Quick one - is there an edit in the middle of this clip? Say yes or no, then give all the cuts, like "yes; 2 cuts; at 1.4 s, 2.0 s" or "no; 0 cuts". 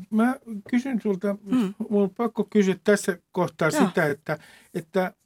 no; 0 cuts